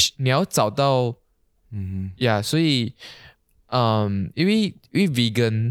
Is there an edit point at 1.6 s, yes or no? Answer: yes